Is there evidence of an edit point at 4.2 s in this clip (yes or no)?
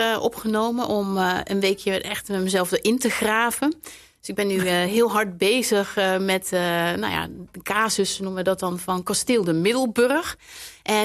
no